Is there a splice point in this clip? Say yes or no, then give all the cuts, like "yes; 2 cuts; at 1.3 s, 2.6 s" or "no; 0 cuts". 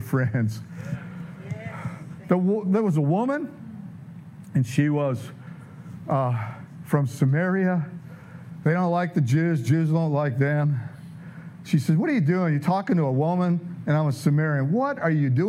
no; 0 cuts